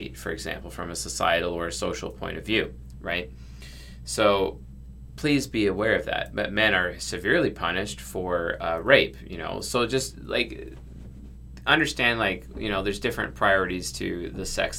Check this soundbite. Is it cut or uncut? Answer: uncut